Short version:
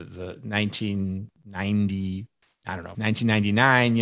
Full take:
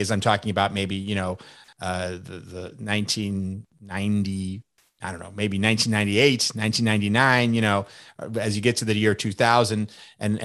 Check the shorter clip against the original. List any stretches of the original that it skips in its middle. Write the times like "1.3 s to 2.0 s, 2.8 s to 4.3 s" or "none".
5.3 s to 6.5 s